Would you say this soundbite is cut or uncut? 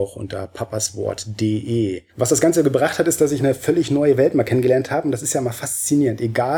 cut